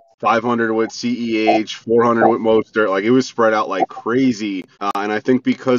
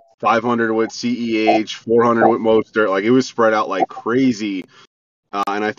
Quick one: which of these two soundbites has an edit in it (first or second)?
first